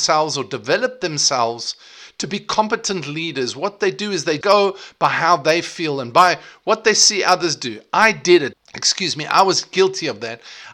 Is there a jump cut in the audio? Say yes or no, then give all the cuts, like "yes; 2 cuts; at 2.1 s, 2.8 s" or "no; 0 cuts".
yes; 2 cuts; at 4.4 s, 8.5 s